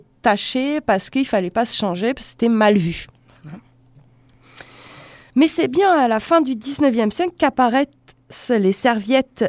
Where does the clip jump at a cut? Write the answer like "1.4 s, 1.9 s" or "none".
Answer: 5.3 s